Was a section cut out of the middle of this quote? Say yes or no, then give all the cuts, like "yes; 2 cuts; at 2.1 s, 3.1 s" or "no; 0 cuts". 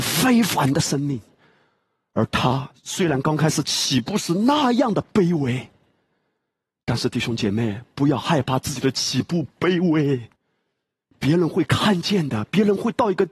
no; 0 cuts